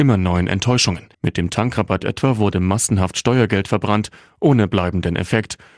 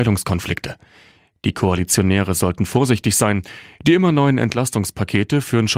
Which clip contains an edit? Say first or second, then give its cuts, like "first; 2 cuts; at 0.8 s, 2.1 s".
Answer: first; 1 cut; at 1.1 s